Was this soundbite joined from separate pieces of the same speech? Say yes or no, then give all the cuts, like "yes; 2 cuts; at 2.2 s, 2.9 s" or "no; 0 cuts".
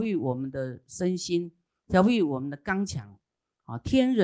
no; 0 cuts